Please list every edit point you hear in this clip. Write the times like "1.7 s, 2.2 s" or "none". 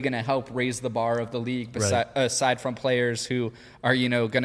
none